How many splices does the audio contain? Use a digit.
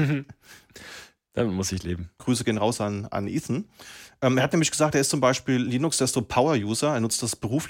1